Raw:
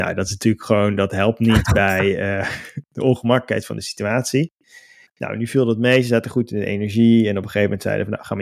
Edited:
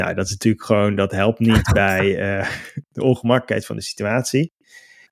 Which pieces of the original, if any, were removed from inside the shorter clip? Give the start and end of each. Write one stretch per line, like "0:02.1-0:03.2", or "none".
none